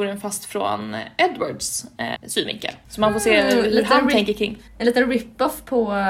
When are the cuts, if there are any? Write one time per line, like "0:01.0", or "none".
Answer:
0:02.2